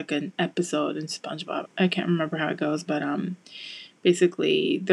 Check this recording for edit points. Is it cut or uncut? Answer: cut